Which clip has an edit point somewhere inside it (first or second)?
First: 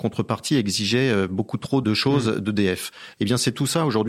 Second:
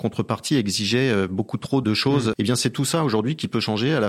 second